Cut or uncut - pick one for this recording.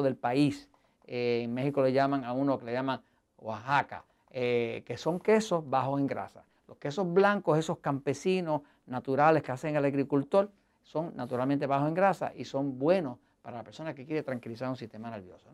uncut